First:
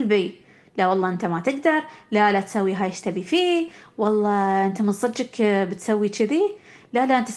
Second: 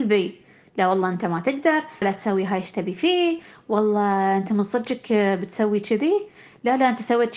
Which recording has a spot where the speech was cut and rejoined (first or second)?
second